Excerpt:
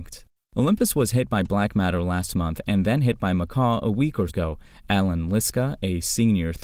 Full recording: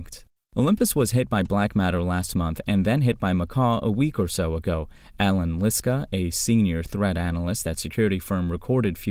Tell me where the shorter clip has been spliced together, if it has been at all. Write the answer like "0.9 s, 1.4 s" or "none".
4.3 s